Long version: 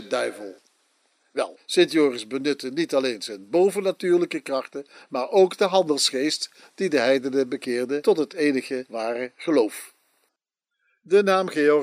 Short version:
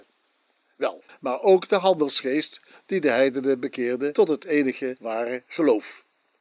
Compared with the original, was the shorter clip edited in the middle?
yes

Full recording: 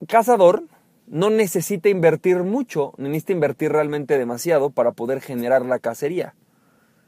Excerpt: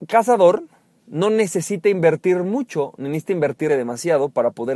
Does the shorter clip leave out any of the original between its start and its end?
yes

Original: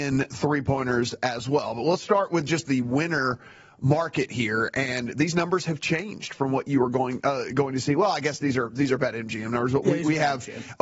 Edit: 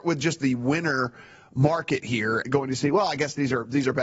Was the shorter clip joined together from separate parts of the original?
yes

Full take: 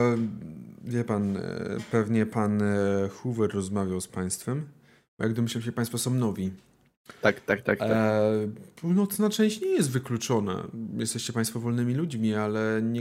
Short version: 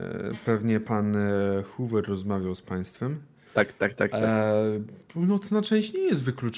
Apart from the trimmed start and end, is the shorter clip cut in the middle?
yes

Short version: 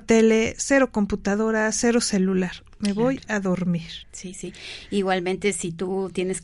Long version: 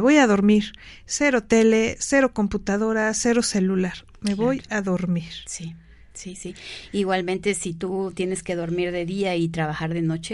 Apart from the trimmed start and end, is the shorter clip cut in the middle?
yes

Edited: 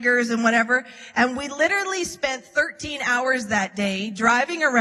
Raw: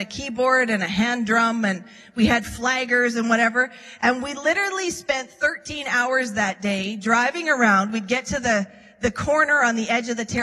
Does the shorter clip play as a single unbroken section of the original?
yes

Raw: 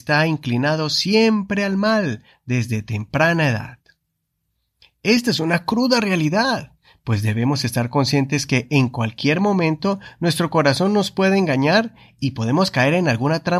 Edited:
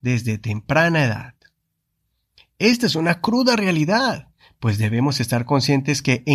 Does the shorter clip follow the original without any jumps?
yes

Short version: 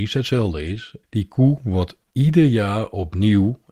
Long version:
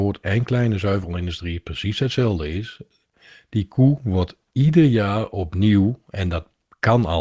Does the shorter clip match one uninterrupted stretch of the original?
no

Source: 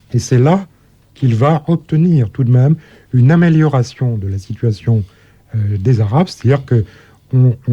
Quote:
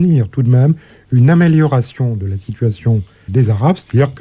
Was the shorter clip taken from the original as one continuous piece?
no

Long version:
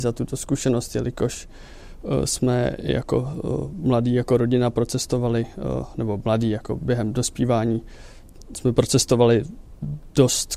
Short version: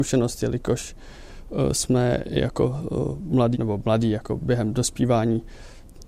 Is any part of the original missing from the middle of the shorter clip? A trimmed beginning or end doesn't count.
yes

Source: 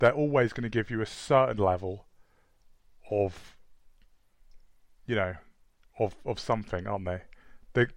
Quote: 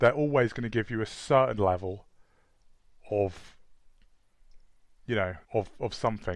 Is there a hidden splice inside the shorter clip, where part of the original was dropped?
yes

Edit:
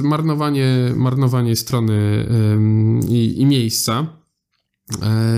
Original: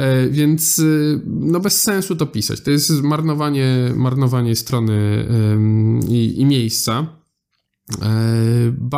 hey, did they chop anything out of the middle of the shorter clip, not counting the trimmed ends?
no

